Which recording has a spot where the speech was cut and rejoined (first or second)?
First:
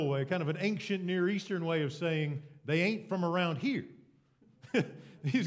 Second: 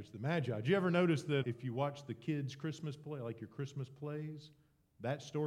second